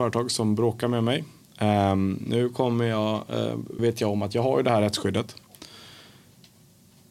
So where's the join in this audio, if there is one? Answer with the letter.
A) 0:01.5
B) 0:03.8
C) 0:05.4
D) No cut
B